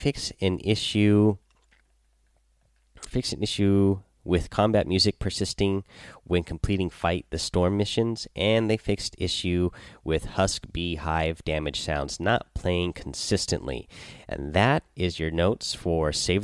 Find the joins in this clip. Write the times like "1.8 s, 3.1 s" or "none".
3.1 s